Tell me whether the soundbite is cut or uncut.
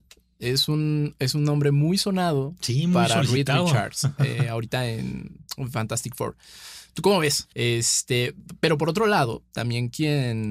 cut